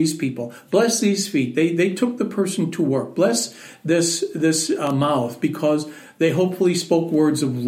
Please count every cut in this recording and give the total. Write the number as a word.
zero